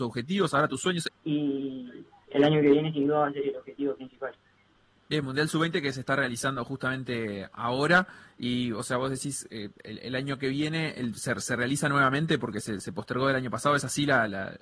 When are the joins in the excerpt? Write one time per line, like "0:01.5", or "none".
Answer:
0:01.1

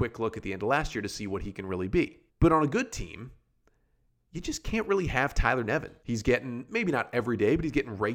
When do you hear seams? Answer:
0:02.3
0:06.0

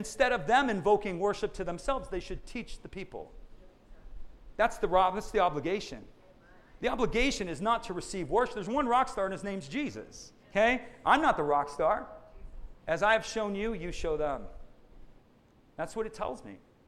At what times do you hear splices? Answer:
0:10.4
0:12.8

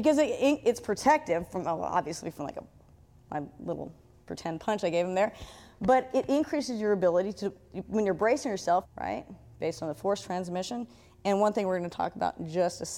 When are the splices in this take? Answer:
0:08.8

